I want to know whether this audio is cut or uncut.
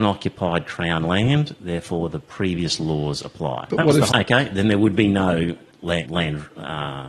cut